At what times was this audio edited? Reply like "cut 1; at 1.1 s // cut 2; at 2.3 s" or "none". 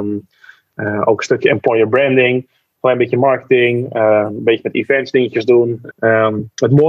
cut 1; at 5.9 s